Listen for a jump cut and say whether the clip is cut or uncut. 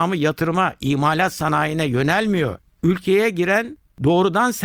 uncut